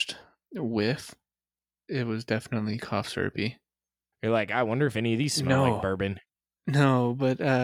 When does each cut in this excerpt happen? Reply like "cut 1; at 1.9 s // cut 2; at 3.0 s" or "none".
cut 1; at 1.9 s // cut 2; at 4.1 s